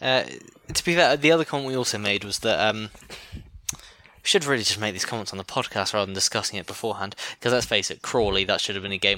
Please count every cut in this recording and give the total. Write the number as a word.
one